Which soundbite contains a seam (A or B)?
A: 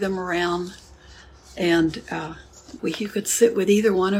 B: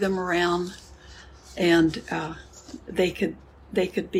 A